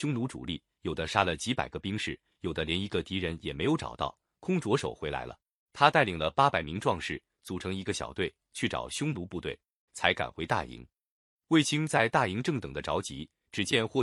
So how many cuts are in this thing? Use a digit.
2